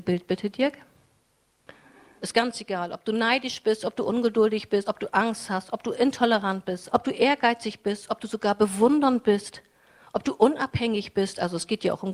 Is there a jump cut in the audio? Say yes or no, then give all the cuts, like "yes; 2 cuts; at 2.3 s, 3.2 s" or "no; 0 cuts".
yes; 3 cuts; at 2.2 s, 4.8 s, 6.9 s